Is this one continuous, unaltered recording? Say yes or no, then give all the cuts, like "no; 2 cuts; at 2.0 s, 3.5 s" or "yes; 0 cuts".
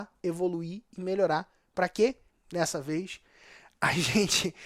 no; 1 cut; at 2.3 s